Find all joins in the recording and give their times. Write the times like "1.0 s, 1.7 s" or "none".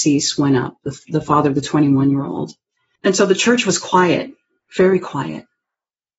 3.0 s

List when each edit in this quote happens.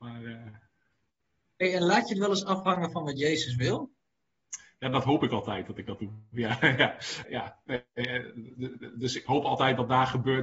7.2 s

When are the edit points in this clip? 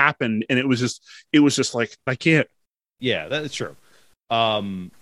2.1 s

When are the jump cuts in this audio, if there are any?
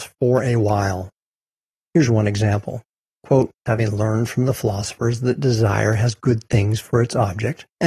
1.9 s, 3.7 s

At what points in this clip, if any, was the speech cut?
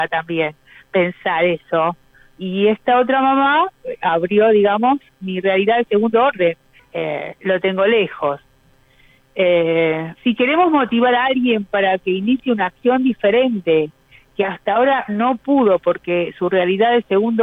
6.8 s, 10.2 s

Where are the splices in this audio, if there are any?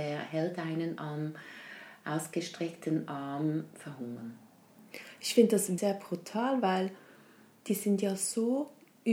5.8 s

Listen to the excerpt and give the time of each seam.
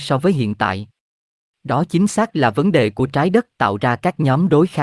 3.5 s

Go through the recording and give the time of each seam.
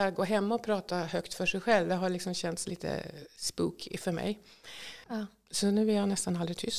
5.0 s

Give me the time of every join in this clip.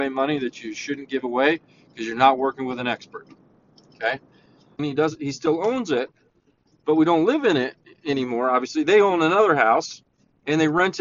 4.8 s

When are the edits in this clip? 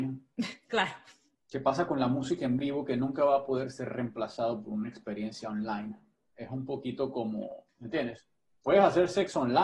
1.3 s, 7.7 s

